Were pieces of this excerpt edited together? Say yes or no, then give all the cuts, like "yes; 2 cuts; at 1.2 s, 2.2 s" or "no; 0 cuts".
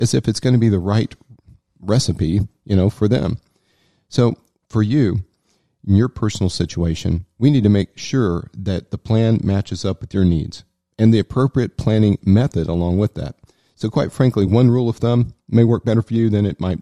no; 0 cuts